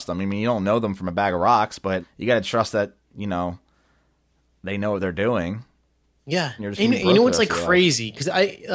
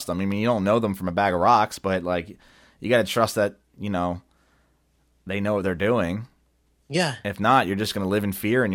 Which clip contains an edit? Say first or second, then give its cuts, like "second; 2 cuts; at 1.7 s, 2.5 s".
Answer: first; 2 cuts; at 2.0 s, 6.6 s